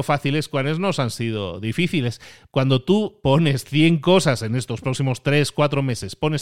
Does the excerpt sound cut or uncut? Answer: cut